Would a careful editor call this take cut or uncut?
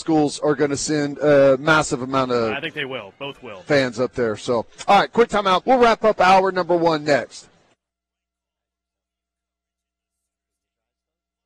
cut